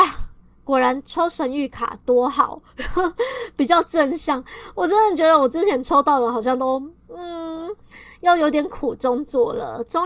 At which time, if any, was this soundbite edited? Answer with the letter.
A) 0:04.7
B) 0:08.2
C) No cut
C